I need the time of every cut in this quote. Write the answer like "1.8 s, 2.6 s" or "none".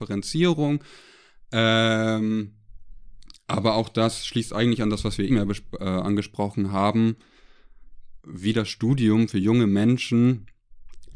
5.3 s, 8.2 s